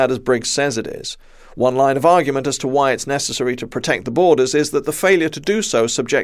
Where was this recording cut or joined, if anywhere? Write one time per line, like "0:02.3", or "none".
none